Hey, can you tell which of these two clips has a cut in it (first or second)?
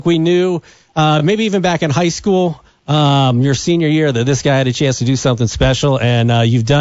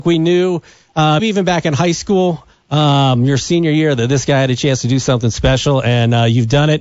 second